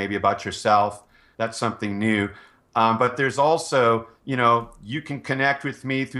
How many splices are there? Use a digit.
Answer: 1